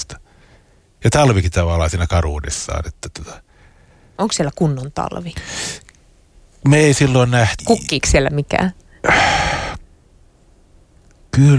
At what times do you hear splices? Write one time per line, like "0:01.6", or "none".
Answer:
0:07.6